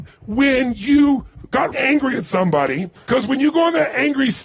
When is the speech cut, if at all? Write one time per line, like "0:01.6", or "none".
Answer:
0:01.7
0:02.9